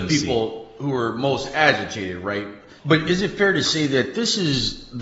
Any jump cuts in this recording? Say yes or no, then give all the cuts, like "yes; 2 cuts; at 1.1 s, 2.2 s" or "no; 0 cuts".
yes; 1 cut; at 2.8 s